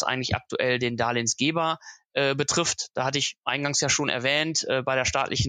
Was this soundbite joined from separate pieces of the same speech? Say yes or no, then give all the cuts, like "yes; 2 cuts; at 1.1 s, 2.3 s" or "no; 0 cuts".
no; 0 cuts